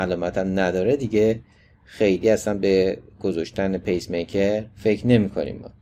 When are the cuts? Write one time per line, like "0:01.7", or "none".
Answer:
0:04.7